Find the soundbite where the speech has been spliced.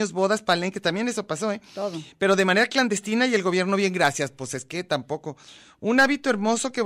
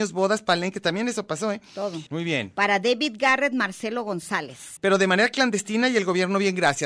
second; 2 cuts; at 2.1 s, 4.8 s

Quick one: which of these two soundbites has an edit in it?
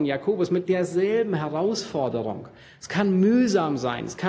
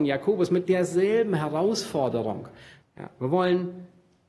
second; 1 cut; at 2.8 s

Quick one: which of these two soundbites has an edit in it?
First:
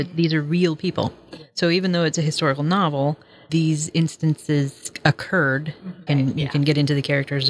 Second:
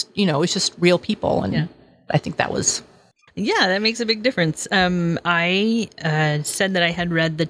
first; 2 cuts; at 3.5 s, 6.1 s

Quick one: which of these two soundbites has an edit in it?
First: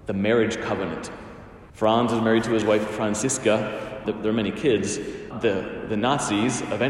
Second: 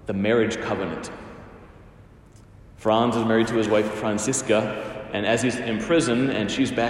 first; 3 cuts; at 1.7 s, 4.0 s, 5.3 s

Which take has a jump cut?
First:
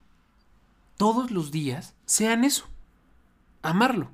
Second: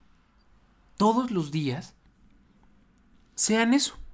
first; 1 cut; at 2.0 s

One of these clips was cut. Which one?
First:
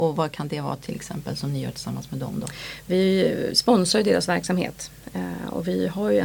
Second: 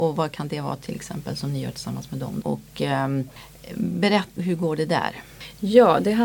second; 2 cuts; at 2.4 s, 4.4 s

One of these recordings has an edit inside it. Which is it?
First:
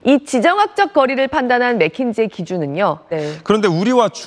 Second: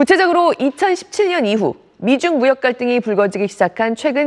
first; 1 cut; at 3.1 s

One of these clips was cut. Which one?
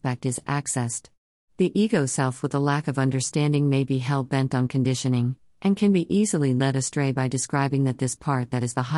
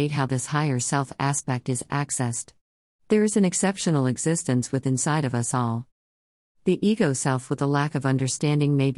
first; 1 cut; at 1.5 s

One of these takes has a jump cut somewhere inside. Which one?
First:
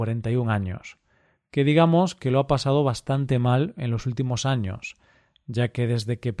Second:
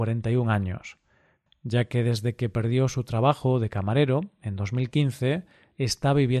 second; 1 cut; at 1.5 s

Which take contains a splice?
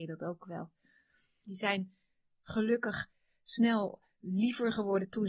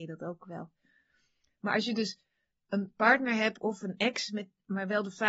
first; 1 cut; at 1.4 s

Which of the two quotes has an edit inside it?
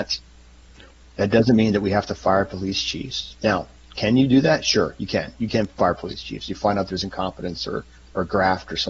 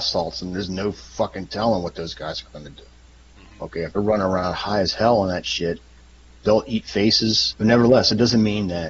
second; 1 cut; at 7.5 s

